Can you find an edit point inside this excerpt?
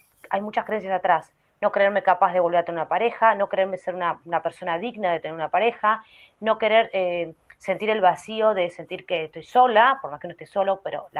no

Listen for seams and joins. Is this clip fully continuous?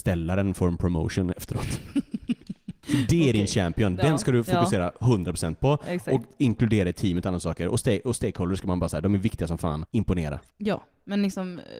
yes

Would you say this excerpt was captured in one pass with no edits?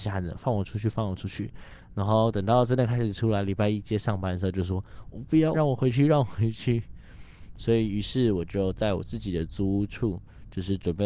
no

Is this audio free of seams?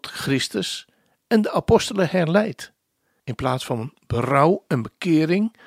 no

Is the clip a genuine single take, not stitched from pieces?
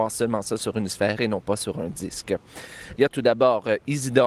no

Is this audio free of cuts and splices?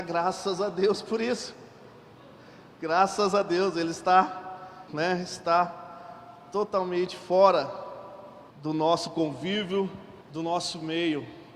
no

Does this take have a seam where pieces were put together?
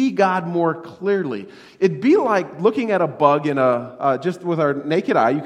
no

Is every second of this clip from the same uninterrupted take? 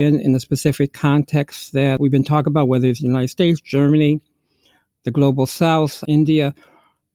yes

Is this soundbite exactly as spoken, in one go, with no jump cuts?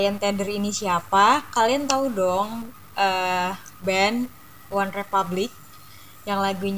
yes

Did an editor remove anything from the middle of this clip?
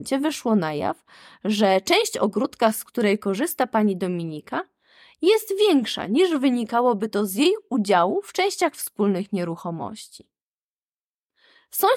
no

